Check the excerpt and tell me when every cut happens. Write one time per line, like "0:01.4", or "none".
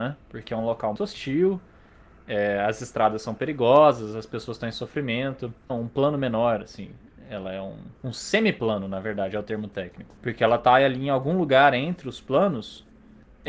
0:01.0
0:05.7
0:08.0